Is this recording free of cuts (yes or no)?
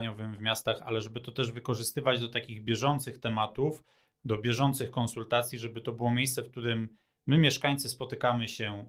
yes